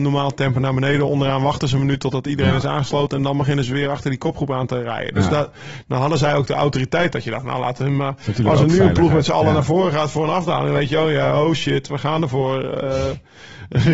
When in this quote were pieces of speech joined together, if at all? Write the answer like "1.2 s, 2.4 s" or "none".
none